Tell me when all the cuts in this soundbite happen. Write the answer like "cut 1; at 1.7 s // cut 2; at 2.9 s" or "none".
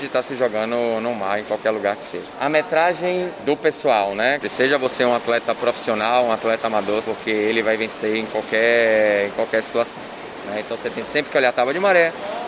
cut 1; at 4.4 s // cut 2; at 7.0 s